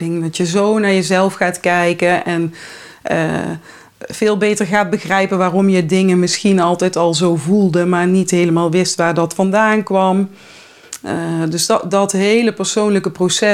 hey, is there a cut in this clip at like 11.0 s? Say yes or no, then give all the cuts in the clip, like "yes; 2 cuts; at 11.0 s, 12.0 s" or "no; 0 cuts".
no; 0 cuts